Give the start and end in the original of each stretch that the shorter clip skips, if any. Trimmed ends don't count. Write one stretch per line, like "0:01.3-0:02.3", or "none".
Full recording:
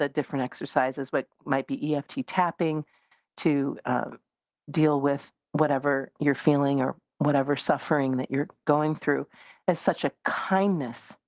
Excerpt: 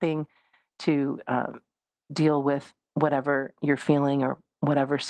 none